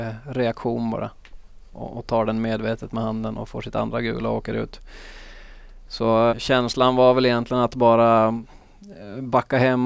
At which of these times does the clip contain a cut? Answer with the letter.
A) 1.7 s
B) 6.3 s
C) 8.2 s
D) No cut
B